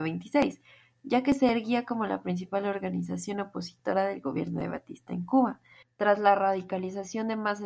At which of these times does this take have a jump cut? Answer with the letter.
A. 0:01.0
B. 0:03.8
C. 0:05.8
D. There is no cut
C